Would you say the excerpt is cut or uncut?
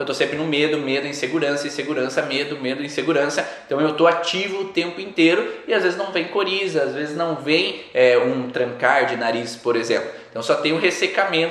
uncut